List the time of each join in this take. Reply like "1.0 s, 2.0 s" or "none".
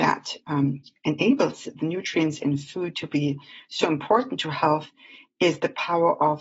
none